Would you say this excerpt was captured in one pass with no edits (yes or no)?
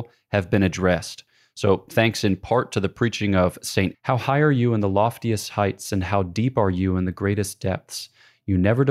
no